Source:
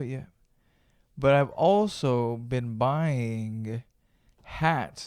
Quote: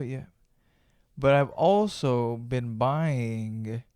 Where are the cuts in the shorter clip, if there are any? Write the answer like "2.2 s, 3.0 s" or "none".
none